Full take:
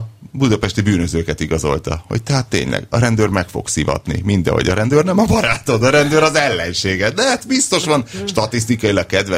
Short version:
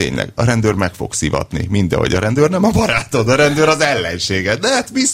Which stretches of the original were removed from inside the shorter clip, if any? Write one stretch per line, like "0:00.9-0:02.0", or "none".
none